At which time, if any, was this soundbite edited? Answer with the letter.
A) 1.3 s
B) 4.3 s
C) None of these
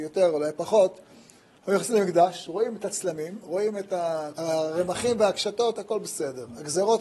B